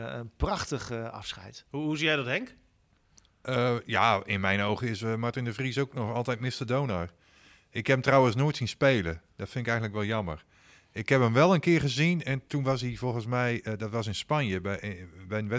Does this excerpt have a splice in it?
no; 0 cuts

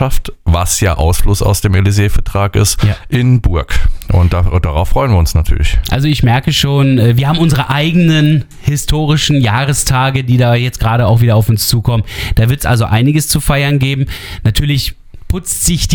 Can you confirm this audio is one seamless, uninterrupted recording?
yes; 0 cuts

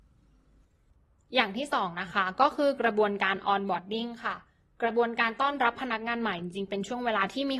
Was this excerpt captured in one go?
yes; 0 cuts

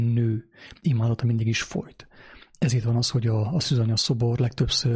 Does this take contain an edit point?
no; 0 cuts

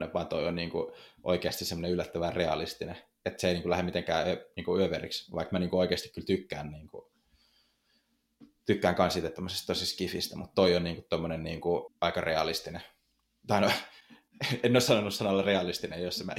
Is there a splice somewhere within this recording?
yes; 1 cut; at 11.9 s

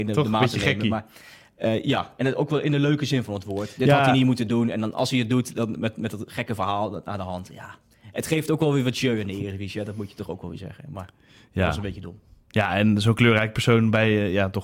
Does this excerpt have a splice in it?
no; 0 cuts

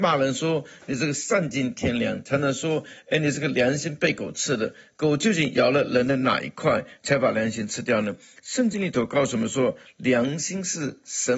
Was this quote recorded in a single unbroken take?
yes; 0 cuts

